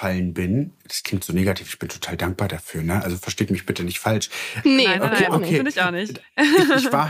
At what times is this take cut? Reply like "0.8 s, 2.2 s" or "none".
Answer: 4.6 s